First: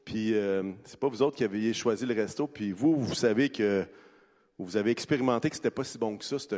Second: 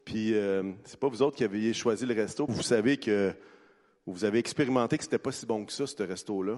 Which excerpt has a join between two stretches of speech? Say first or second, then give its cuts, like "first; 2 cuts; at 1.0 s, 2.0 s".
second; 1 cut; at 2.5 s